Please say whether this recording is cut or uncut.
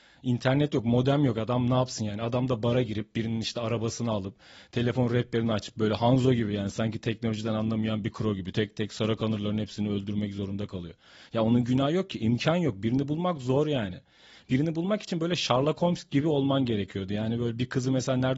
uncut